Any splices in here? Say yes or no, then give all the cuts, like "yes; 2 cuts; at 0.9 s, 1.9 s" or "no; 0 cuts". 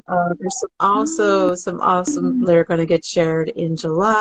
yes; 1 cut; at 2.4 s